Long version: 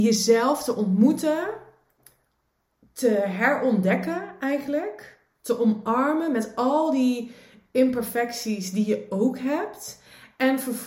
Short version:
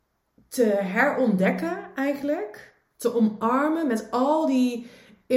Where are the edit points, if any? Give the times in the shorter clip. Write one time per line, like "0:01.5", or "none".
none